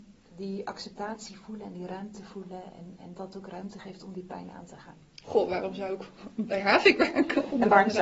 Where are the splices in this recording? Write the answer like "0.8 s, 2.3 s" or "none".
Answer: 3.1 s, 5.2 s